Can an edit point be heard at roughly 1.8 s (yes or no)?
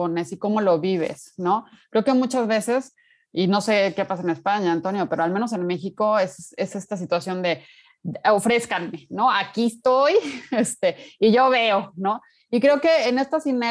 no